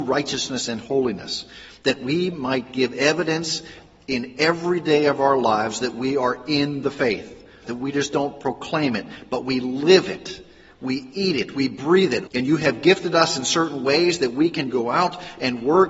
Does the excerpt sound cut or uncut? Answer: cut